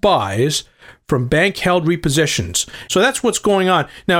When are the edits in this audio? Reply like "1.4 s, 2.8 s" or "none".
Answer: 2.9 s